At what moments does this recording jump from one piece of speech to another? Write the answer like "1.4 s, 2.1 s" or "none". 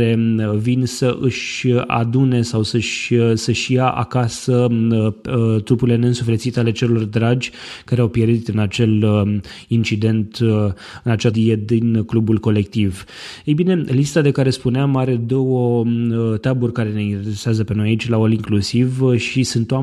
11.3 s